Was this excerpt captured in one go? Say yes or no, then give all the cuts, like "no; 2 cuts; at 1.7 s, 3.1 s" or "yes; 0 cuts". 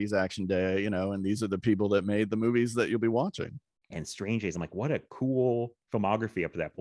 no; 2 cuts; at 3.9 s, 5.8 s